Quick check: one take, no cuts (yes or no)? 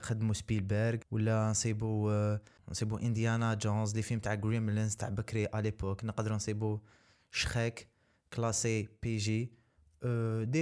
yes